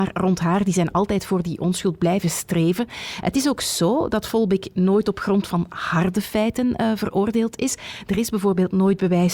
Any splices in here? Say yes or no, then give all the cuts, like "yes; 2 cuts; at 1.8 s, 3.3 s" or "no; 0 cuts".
no; 0 cuts